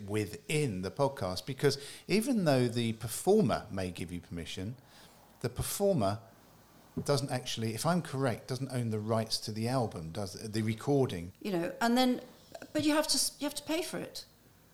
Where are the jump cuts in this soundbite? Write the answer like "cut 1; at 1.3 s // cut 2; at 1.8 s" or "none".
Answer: cut 1; at 11.3 s